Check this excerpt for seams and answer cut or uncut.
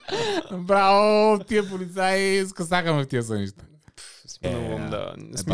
cut